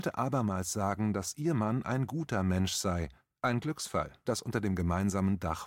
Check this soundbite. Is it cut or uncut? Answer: cut